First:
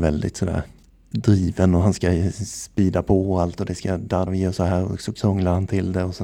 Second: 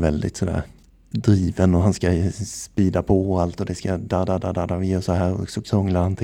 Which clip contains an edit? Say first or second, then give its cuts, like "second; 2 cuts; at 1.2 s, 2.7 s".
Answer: first; 1 cut; at 4.3 s